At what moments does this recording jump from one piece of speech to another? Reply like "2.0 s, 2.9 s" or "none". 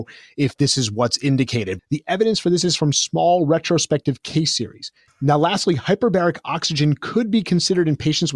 1.8 s, 5.1 s